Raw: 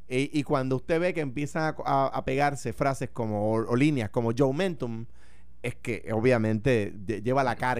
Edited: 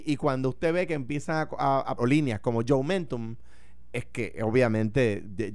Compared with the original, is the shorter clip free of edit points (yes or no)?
no